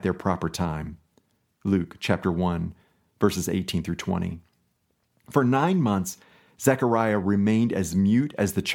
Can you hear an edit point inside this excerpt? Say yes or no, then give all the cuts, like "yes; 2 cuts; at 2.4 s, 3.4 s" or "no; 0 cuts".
no; 0 cuts